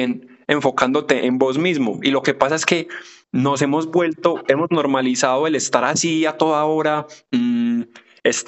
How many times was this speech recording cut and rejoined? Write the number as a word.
zero